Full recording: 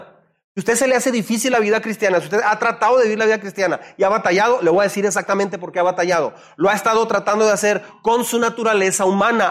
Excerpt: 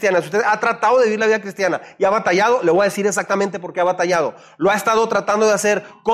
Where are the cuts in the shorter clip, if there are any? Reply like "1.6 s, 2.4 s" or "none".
none

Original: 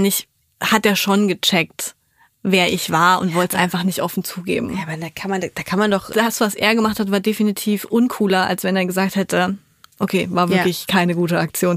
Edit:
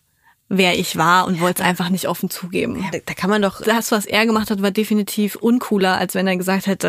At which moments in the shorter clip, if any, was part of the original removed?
2.9 s

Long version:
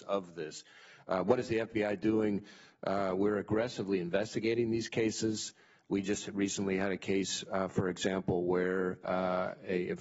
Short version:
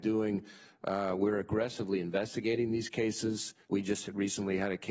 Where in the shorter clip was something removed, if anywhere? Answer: 3.6 s

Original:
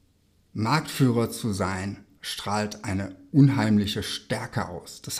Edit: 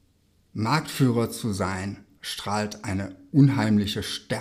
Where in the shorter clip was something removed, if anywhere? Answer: none

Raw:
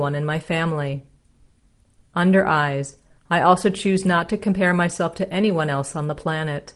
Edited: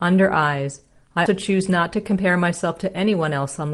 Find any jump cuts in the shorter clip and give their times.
1.3 s

